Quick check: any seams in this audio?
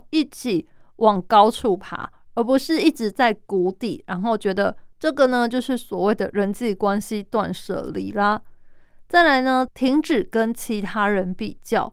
yes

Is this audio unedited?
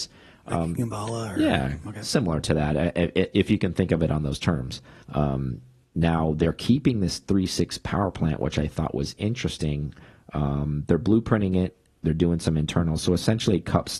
no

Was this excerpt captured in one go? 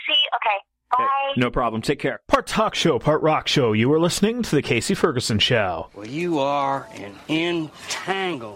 yes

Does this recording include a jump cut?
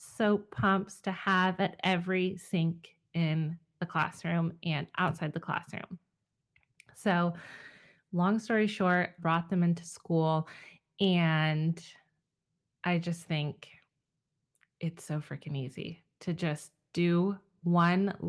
yes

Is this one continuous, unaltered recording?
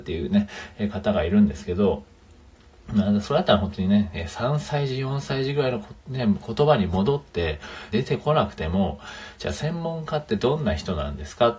no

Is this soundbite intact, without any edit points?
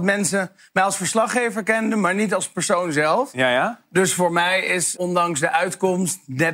no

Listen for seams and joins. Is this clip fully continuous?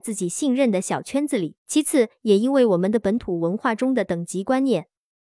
no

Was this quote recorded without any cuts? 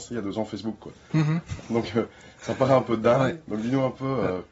no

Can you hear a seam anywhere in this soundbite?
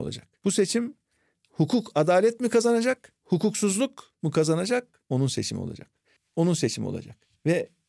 yes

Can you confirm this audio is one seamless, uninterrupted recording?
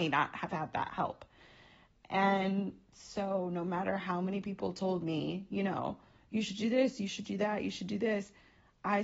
yes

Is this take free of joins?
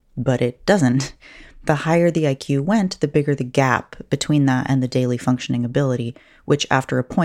yes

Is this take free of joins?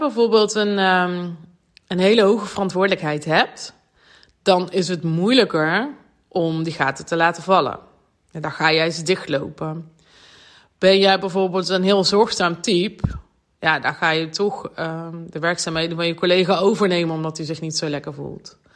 yes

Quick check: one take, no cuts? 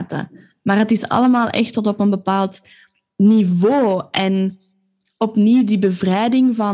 yes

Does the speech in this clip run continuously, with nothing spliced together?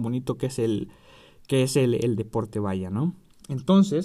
yes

